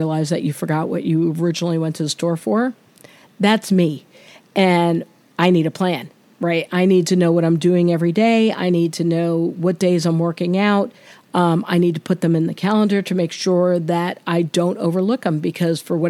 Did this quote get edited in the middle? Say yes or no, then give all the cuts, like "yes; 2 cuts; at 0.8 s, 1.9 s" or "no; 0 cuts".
no; 0 cuts